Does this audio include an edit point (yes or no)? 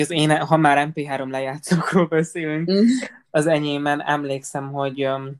no